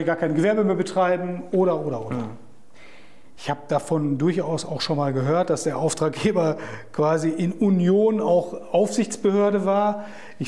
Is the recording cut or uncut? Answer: cut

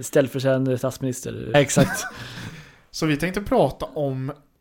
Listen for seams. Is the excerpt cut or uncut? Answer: cut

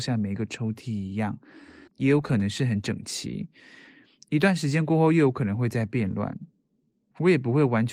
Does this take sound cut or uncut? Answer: cut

